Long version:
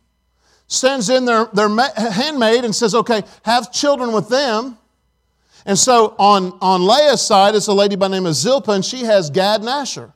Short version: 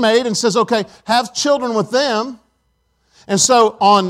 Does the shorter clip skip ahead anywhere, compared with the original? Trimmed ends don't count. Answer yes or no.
no